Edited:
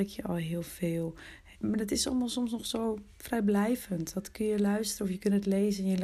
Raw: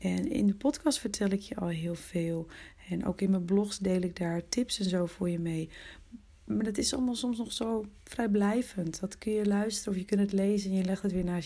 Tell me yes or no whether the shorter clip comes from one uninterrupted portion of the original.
no